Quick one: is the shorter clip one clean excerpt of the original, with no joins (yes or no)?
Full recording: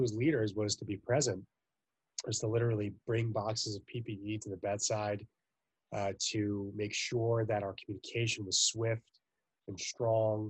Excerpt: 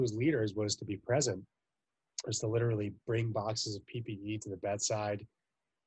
yes